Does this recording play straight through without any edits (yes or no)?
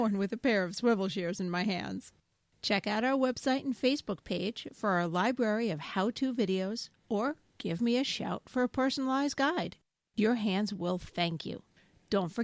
yes